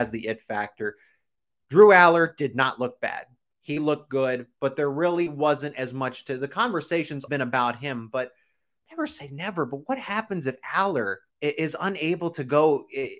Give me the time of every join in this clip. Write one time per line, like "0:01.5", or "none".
0:07.3
0:11.3